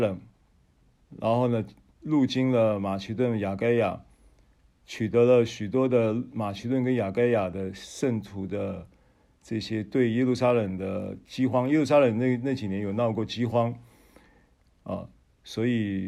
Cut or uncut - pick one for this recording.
uncut